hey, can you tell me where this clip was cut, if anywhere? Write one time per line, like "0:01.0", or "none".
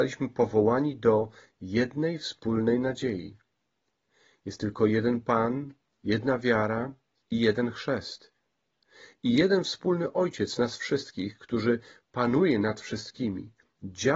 none